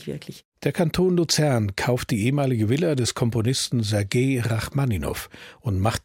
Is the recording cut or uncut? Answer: uncut